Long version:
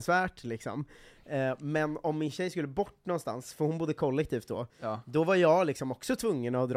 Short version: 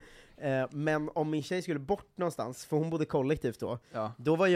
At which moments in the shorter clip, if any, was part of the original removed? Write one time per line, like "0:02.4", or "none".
none